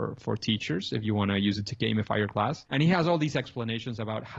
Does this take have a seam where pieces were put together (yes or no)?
yes